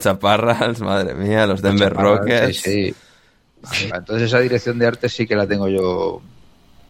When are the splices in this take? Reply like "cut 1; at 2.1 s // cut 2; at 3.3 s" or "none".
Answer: cut 1; at 3.9 s